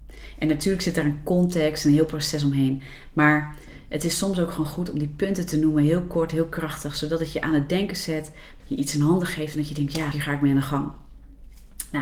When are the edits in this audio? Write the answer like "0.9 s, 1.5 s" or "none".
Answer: 8.6 s, 10.1 s